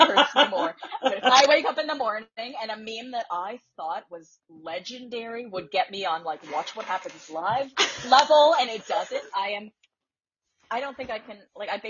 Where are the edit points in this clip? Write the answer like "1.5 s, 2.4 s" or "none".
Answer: 9.3 s